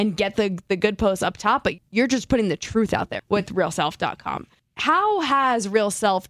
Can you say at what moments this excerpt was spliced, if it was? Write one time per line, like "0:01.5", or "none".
0:01.8
0:03.2

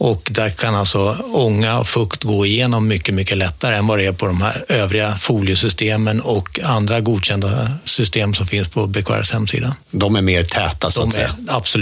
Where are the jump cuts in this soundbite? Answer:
0:09.8

